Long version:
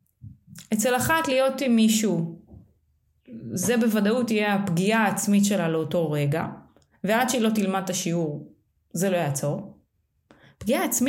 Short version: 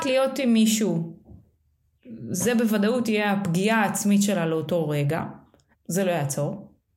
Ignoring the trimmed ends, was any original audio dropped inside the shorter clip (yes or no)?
yes